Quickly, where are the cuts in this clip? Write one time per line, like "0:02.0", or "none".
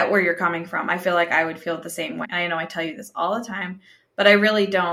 0:02.2

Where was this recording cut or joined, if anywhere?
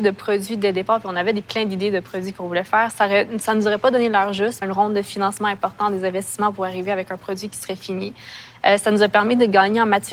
0:04.6

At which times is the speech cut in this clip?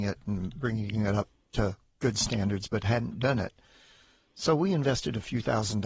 none

